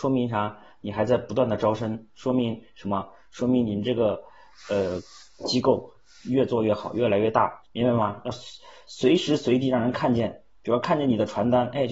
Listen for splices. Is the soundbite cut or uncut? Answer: cut